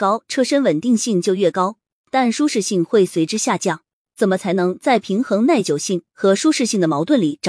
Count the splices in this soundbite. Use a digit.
0